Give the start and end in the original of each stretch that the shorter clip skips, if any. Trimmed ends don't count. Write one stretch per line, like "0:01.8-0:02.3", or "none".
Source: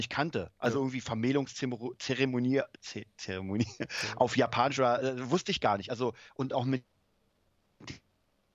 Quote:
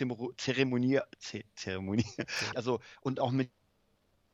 0:04.1-0:05.9